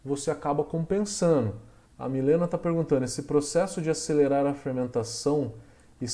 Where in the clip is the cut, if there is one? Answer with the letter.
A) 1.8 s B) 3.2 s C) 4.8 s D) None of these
A